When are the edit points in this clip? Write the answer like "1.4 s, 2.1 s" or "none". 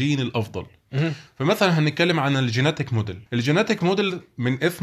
1.3 s, 3.3 s